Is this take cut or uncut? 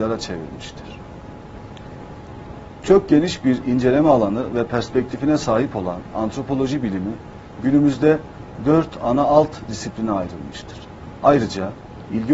cut